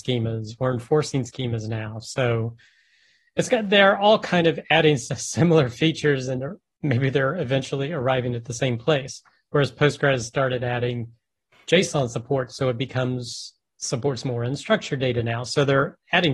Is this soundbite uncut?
yes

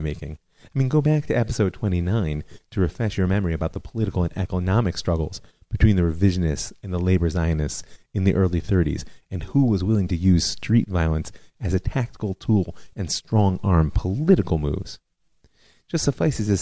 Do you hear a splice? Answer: no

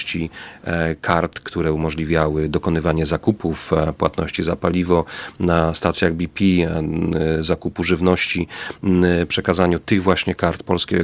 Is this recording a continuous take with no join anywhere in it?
yes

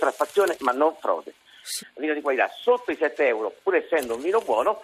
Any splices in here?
yes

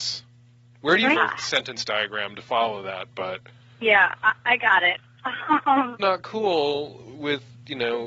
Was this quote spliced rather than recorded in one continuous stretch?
yes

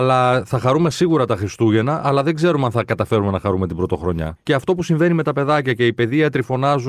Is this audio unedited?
no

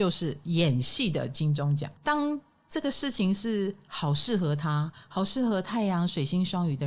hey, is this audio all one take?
no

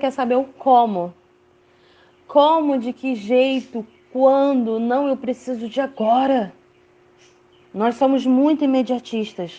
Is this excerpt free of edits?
yes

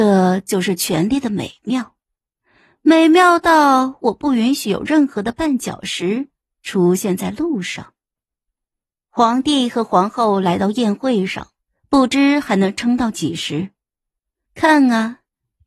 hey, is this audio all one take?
no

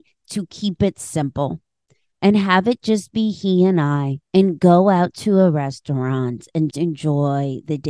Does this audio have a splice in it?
yes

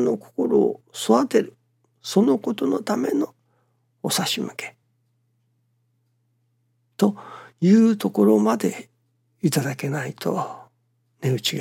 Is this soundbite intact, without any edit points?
yes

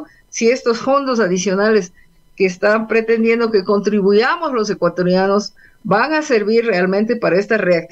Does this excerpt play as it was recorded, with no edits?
yes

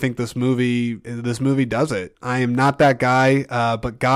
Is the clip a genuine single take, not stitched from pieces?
no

